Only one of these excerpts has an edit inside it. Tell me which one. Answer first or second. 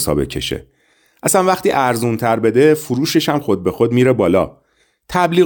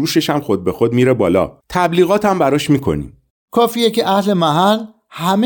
second